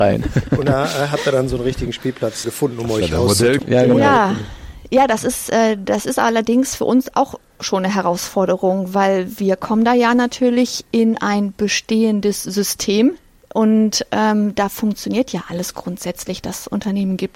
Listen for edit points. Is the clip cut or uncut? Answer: cut